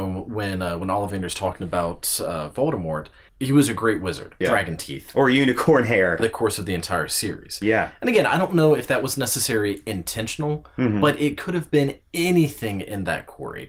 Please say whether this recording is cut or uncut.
cut